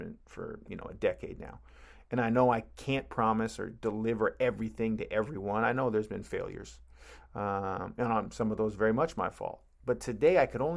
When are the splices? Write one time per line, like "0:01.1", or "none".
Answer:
none